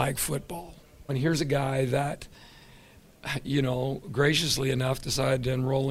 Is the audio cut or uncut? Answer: cut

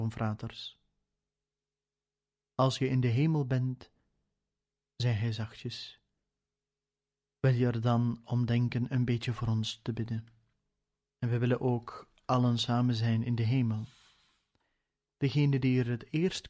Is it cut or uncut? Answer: cut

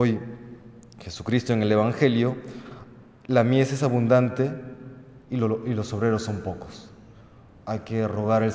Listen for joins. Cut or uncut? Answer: uncut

